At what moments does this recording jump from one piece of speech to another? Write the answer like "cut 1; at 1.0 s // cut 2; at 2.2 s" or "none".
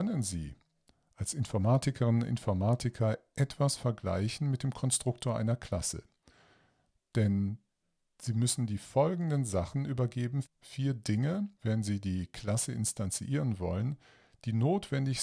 cut 1; at 10.4 s // cut 2; at 11.6 s